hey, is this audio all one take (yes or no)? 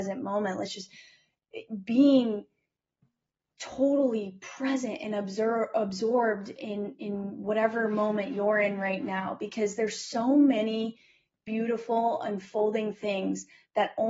yes